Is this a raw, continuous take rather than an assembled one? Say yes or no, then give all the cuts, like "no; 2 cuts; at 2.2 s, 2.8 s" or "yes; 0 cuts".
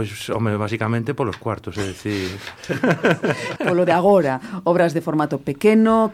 no; 1 cut; at 3.6 s